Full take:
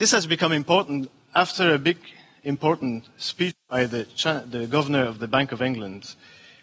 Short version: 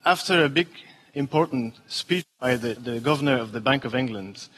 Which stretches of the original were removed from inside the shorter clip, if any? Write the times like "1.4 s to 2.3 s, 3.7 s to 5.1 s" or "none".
4.1 s to 4.4 s